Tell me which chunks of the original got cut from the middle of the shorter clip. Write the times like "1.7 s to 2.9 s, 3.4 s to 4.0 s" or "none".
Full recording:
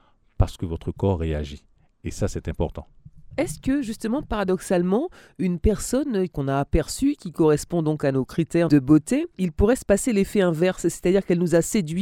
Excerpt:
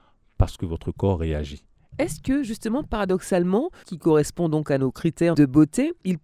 1.9 s to 3.3 s, 5.2 s to 7.2 s